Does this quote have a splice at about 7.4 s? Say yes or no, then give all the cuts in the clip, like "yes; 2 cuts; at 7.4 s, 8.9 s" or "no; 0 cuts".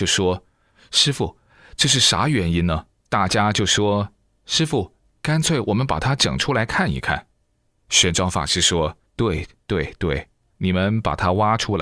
no; 1 cut; at 2.9 s